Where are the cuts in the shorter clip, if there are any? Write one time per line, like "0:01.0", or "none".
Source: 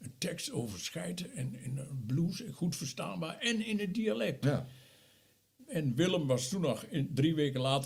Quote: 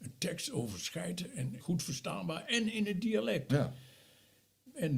0:01.6